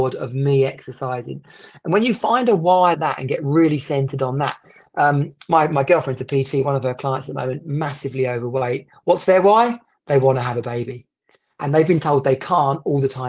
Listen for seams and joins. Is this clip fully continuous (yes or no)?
no